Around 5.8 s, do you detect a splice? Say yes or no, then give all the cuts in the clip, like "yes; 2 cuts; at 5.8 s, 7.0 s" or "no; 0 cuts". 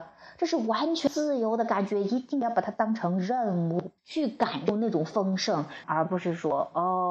yes; 2 cuts; at 4.0 s, 5.8 s